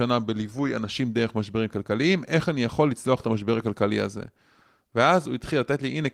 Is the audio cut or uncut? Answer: uncut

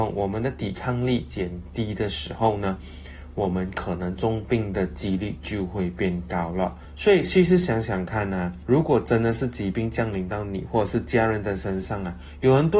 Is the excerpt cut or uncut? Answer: uncut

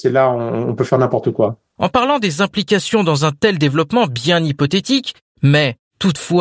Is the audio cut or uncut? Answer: uncut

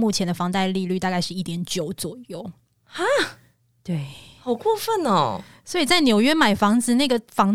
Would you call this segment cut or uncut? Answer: uncut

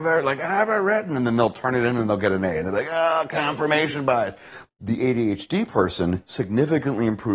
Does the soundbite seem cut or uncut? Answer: cut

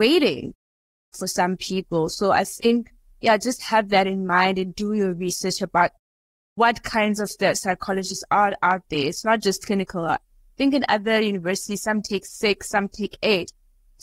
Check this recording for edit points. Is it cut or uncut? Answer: cut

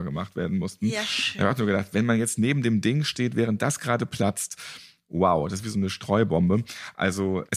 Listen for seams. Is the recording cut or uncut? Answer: uncut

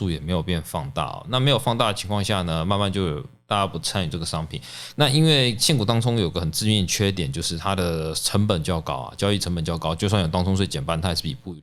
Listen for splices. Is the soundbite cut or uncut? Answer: cut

